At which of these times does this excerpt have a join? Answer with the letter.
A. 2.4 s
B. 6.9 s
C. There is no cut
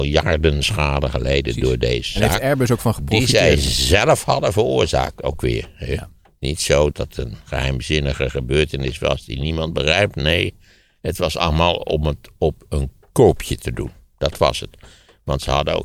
B